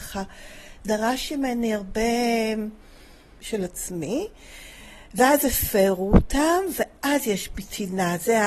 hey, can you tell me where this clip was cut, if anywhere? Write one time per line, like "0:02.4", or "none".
0:03.4